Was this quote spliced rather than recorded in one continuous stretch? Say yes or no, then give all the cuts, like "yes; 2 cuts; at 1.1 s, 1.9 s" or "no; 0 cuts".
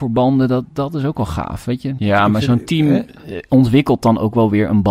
yes; 1 cut; at 2.0 s